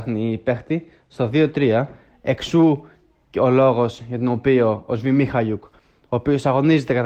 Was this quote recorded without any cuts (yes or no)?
yes